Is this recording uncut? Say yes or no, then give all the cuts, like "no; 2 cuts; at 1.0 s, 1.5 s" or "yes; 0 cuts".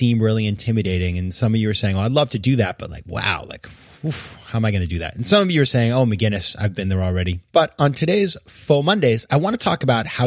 no; 1 cut; at 7.5 s